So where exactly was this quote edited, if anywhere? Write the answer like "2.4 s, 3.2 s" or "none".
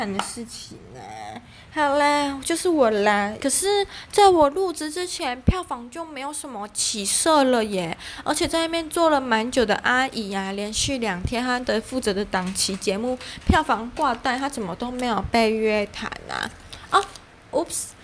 3.4 s